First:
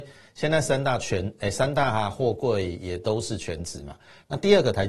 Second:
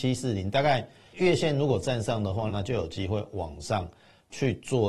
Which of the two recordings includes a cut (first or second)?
second